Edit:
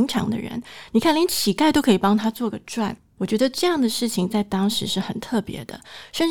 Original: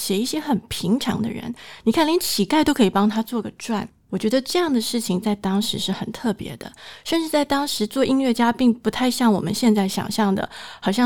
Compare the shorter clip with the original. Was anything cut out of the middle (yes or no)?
no